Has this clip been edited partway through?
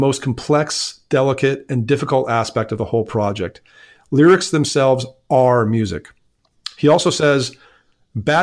no; 0 cuts

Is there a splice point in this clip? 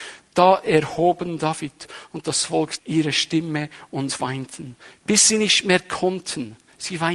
yes; 1 cut; at 2.8 s

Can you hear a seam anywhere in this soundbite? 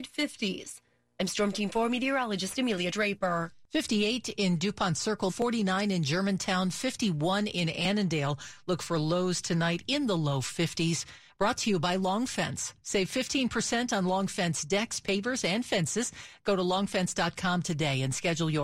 yes; 1 cut; at 5.3 s

